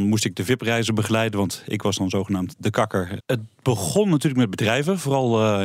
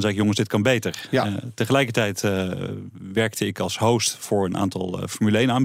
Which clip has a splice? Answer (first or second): first